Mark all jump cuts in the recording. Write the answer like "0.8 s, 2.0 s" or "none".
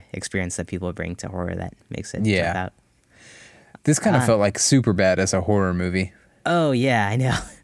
none